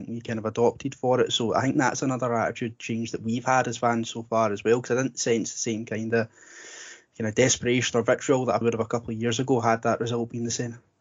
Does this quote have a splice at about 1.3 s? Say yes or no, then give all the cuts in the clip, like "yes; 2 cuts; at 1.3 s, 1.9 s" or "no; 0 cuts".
no; 1 cut; at 8.6 s